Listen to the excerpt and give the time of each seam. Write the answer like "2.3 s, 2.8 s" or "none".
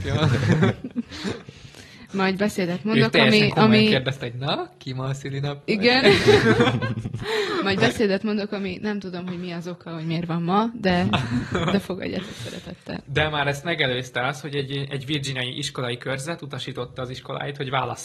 none